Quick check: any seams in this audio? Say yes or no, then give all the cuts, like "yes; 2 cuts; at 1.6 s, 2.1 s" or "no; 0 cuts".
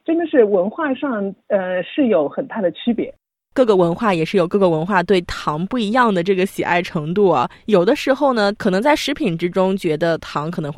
yes; 1 cut; at 3.4 s